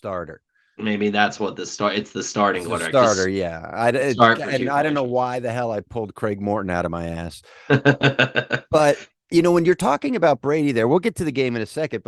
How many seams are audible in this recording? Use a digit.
0